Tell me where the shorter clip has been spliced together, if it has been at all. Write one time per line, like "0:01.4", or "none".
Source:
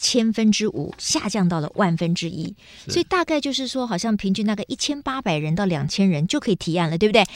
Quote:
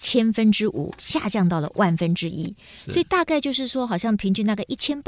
none